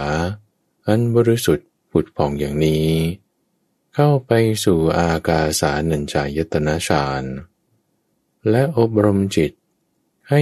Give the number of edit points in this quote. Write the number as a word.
zero